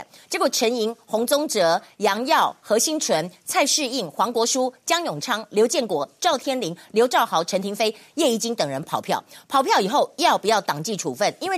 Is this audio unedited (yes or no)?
yes